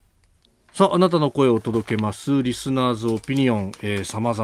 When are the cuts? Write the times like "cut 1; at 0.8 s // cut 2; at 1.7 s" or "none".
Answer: none